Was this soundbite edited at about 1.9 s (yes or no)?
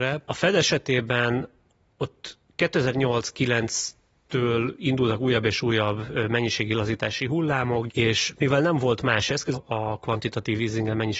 no